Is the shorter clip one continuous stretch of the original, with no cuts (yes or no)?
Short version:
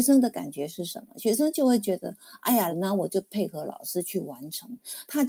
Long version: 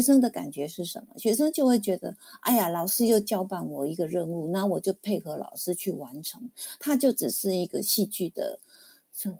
no